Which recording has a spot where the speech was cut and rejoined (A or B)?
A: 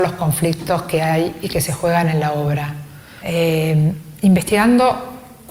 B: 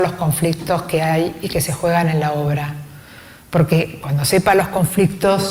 A